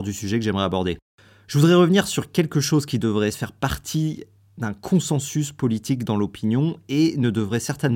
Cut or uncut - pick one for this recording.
cut